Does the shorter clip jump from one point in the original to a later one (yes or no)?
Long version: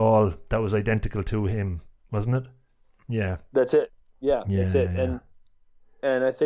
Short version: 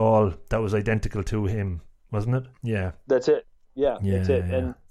yes